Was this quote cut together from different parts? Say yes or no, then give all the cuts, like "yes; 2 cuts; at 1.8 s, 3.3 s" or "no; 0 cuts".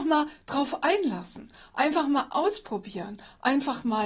no; 0 cuts